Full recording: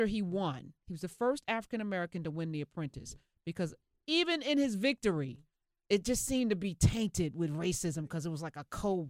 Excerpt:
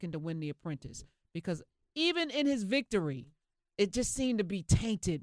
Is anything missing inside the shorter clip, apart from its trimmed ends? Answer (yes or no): no